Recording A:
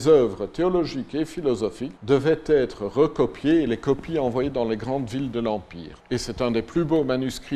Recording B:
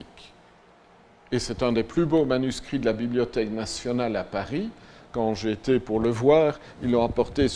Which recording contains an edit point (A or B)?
A